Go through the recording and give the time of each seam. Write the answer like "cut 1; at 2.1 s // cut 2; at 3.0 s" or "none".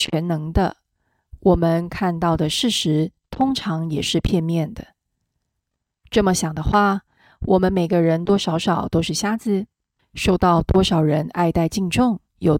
cut 1; at 8.3 s // cut 2; at 10.0 s